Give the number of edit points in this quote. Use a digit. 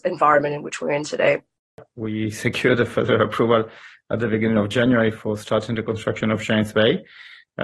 0